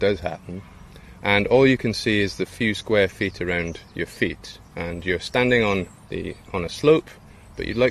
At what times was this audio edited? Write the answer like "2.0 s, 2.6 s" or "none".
none